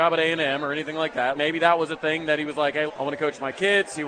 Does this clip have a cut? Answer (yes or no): yes